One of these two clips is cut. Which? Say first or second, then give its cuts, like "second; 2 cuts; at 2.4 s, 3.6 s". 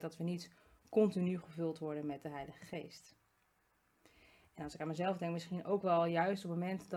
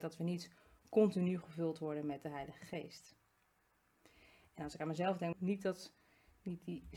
second; 1 cut; at 5.3 s